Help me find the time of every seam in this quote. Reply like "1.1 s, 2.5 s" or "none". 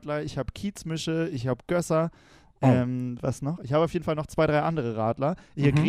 none

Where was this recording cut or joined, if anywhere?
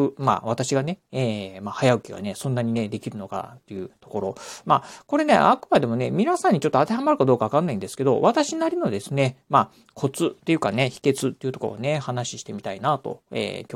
none

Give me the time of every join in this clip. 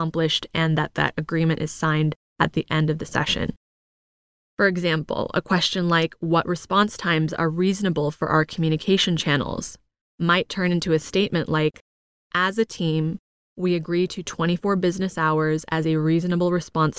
none

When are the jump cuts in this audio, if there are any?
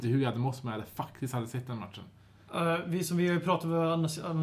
none

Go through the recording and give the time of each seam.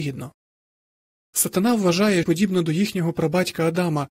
2.2 s

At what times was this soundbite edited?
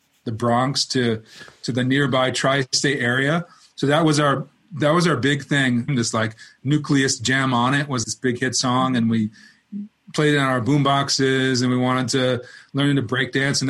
5.9 s, 8.0 s

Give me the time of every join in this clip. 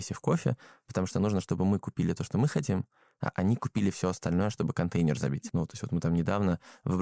5.5 s

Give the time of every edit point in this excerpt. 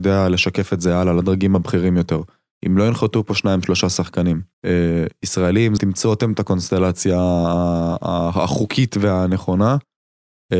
4.5 s, 5.8 s

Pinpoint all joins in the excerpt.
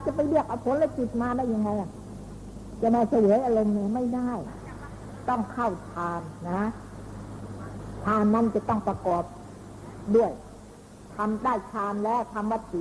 none

